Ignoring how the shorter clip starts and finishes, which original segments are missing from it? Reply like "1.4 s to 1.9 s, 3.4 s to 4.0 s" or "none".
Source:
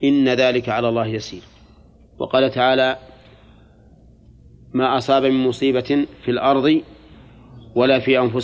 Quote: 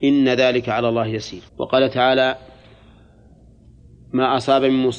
1.5 s to 2.1 s